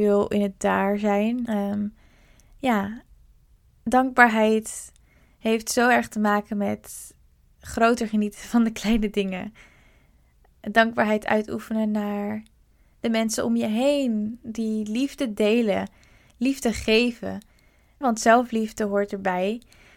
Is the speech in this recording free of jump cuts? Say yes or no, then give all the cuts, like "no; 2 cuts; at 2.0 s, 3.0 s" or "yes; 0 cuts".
no; 2 cuts; at 1.5 s, 18.0 s